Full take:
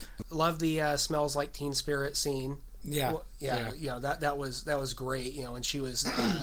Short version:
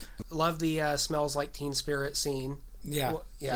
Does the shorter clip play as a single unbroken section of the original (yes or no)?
yes